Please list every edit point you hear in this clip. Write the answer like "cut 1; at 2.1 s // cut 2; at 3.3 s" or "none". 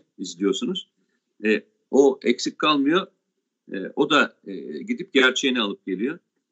cut 1; at 1.8 s